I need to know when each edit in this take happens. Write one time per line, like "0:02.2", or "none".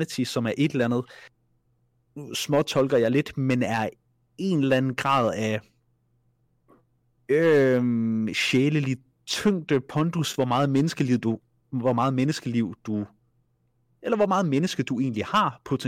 none